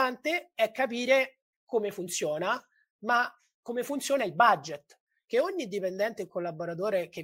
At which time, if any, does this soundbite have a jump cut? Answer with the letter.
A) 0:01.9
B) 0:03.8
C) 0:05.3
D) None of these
C